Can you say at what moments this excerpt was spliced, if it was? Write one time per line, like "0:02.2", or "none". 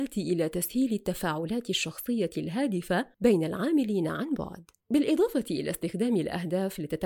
0:04.8